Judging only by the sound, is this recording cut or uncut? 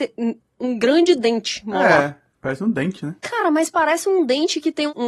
uncut